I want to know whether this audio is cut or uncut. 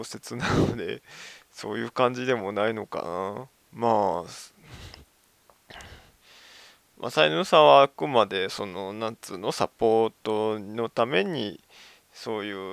uncut